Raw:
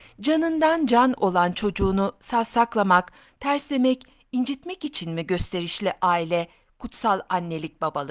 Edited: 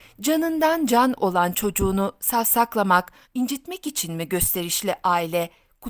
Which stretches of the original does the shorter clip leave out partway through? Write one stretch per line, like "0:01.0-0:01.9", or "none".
0:03.2-0:04.2